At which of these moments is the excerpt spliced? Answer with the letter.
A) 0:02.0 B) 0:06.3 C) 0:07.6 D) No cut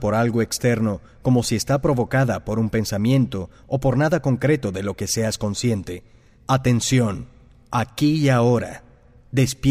B